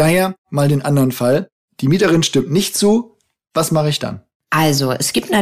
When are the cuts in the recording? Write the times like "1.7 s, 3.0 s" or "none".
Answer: none